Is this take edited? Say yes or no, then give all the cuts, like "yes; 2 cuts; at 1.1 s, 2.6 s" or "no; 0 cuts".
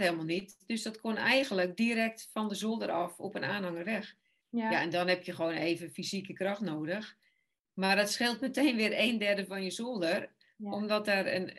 no; 0 cuts